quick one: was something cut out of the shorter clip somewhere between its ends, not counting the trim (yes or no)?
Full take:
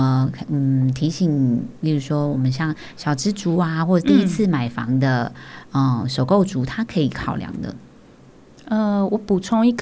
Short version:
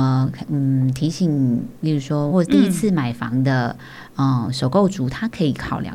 yes